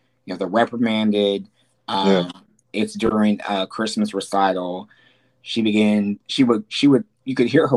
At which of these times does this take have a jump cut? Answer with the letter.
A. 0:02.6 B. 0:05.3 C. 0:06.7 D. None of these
A